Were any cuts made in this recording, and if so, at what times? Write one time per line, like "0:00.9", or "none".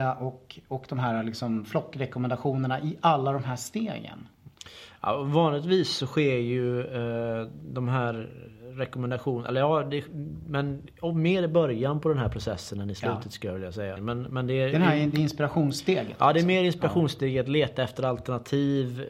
0:14.0